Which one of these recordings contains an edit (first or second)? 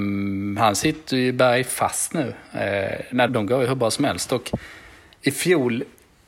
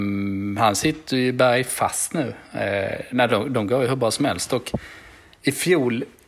first